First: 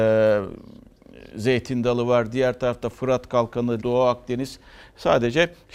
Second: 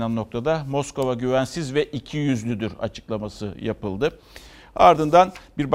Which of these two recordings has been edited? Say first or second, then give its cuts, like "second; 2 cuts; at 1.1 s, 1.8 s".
first; 1 cut; at 3.8 s